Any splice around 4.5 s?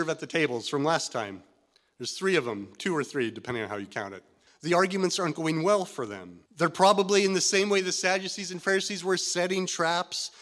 yes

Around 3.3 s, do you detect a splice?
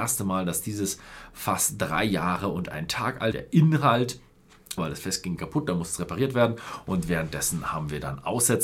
yes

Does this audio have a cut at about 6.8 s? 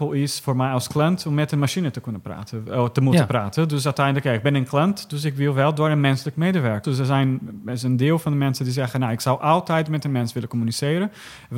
yes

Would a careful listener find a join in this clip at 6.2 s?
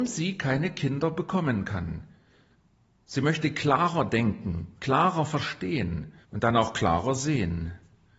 yes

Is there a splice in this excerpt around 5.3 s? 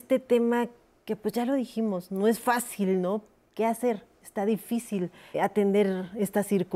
yes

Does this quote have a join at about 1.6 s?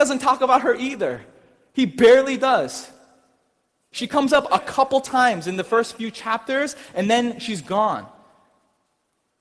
no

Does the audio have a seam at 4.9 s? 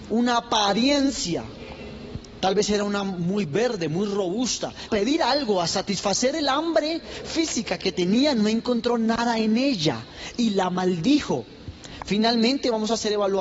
yes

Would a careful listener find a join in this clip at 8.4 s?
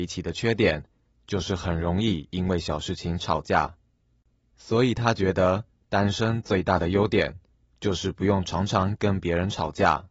no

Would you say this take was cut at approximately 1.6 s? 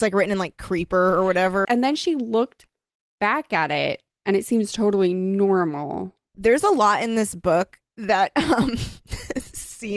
yes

